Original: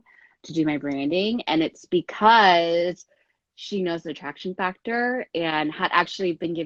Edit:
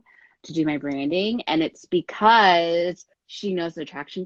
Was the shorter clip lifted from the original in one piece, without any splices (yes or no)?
no